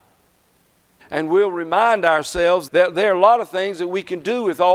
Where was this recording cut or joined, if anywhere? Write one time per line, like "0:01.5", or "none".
0:01.0
0:02.7

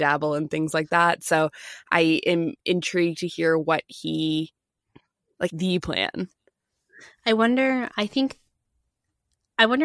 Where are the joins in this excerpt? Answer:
0:05.5
0:07.9

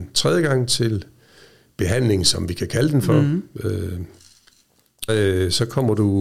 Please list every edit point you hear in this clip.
0:05.1

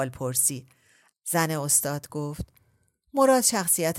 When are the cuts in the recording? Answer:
0:01.1

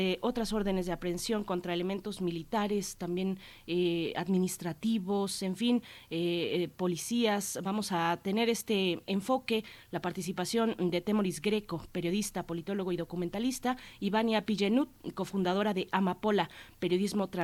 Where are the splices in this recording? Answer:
none

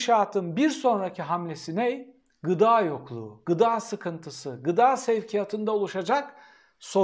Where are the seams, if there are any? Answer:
none

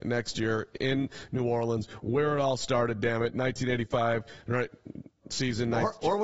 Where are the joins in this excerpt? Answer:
none

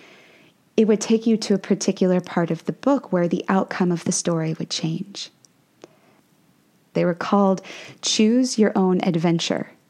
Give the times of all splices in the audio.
0:06.9

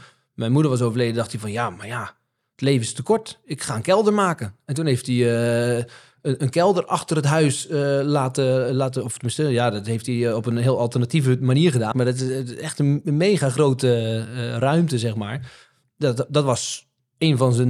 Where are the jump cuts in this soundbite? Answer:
0:11.9

